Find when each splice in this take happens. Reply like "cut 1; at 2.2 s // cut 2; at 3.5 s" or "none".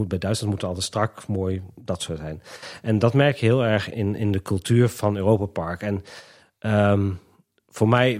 cut 1; at 3.9 s